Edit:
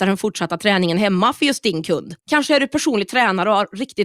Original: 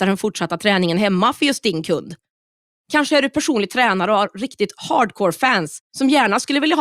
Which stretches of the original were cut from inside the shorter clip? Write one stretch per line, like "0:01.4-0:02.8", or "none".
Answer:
0:02.2-0:02.8